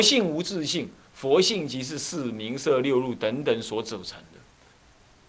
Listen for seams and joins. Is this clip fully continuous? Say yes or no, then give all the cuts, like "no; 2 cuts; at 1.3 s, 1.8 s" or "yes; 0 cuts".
yes; 0 cuts